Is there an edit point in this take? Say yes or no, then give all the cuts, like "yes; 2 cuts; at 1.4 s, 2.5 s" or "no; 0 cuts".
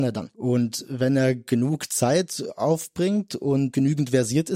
no; 0 cuts